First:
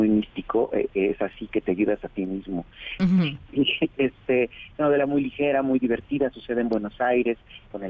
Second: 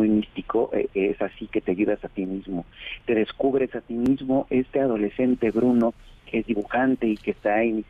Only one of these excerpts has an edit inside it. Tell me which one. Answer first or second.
first